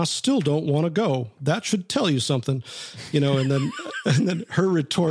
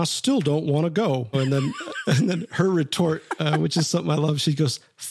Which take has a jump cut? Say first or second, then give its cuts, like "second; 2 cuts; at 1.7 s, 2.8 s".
second; 1 cut; at 1.3 s